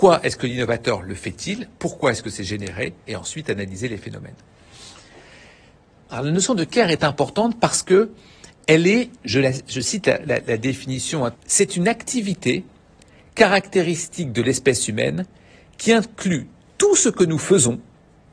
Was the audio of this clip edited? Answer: yes; 2 cuts; at 6.0 s, 11.3 s

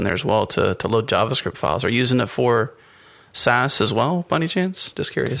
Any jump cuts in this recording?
no; 0 cuts

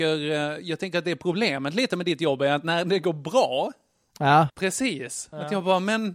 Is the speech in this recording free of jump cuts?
no; 1 cut; at 4.5 s

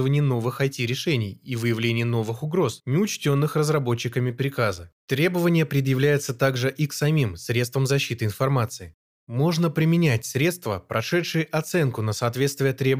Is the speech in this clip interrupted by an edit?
yes; 1 cut; at 5.0 s

